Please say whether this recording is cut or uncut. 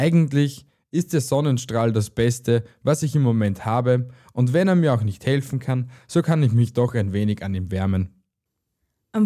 uncut